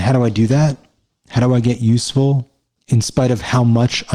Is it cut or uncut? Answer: uncut